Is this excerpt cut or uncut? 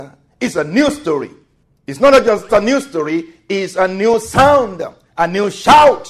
cut